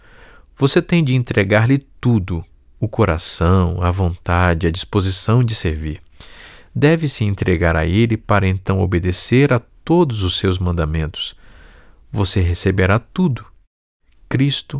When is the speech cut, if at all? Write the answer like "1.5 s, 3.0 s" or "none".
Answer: none